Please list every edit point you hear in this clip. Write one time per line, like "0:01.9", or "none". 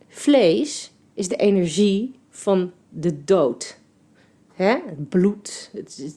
none